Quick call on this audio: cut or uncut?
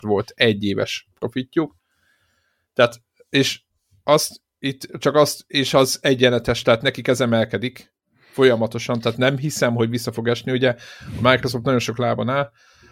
uncut